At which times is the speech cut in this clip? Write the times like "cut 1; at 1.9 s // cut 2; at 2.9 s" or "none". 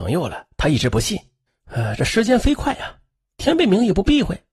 cut 1; at 1.5 s // cut 2; at 3.3 s